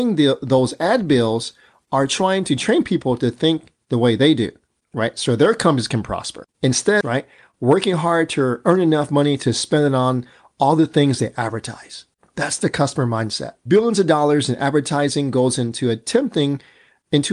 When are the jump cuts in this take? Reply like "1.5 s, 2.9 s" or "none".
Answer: 7.0 s, 13.7 s